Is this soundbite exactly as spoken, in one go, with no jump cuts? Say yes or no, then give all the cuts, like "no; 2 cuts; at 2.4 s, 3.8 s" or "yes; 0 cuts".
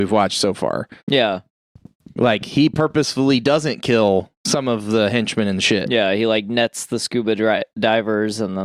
yes; 0 cuts